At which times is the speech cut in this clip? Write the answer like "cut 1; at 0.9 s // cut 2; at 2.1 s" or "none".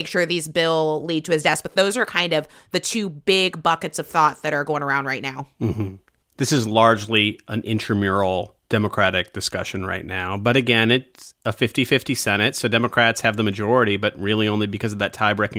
cut 1; at 8.6 s